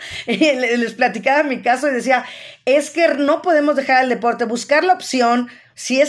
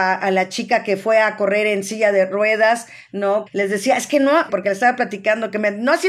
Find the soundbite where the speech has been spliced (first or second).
second